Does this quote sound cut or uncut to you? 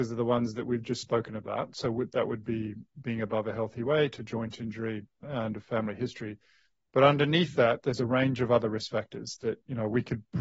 uncut